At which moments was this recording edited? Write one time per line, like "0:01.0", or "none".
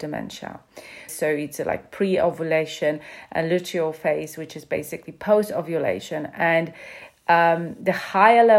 0:01.1